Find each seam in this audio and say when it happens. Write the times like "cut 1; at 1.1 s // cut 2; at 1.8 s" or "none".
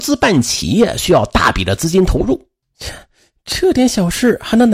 cut 1; at 2.6 s